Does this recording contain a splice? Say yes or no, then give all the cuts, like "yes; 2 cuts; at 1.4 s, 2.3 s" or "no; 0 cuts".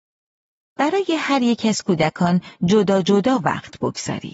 no; 0 cuts